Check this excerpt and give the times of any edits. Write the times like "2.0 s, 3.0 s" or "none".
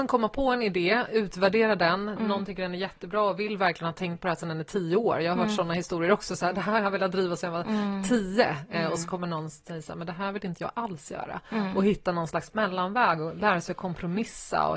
2.2 s